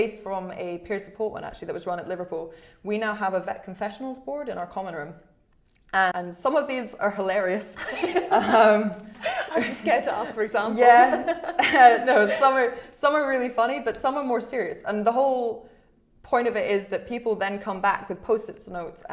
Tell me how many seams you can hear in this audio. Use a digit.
1